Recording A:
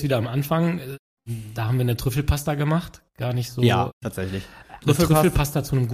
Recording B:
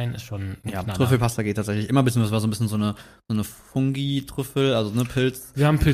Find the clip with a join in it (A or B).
A